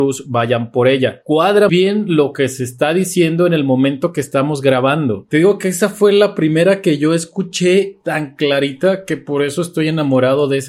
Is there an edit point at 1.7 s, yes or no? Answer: yes